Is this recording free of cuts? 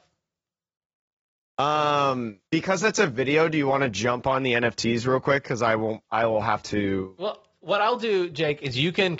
no; 1 cut; at 2.5 s

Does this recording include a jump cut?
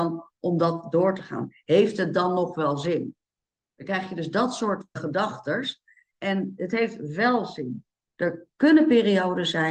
yes; 2 cuts; at 5.0 s, 8.1 s

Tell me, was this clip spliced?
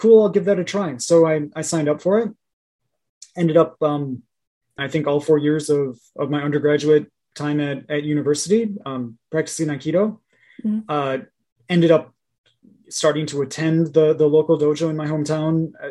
yes; 1 cut; at 4.8 s

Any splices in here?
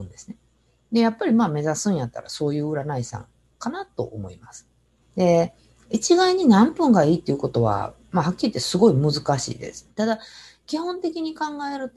yes; 2 cuts; at 5.0 s, 9.9 s

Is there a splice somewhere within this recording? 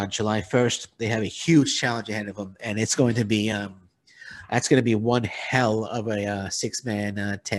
no; 0 cuts

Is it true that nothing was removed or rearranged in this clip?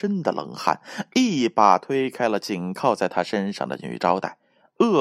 yes; 0 cuts

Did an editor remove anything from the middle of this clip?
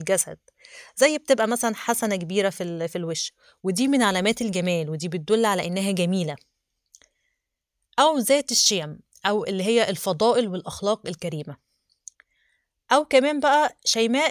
no; 0 cuts

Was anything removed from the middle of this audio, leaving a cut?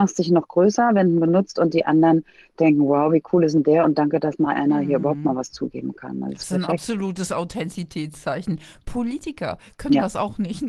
no; 0 cuts

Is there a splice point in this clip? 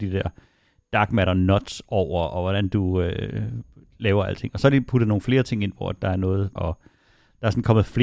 yes; 1 cut; at 6.6 s

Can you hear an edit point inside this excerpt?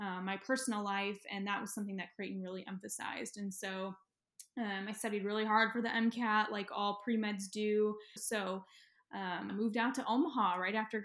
yes; 2 cuts; at 8.2 s, 9.5 s

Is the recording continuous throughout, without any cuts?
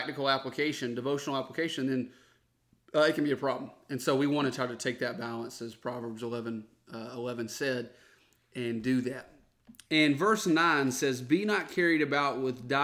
no; 1 cut; at 9.8 s

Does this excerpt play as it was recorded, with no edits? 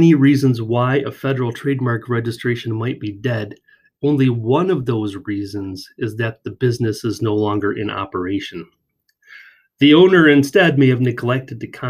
yes; 0 cuts

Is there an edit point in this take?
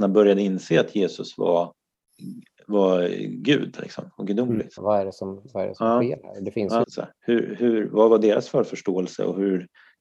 yes; 2 cuts; at 4.8 s, 6.8 s

